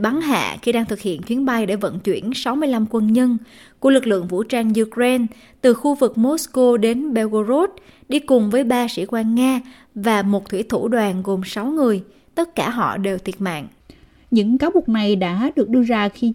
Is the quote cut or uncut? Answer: uncut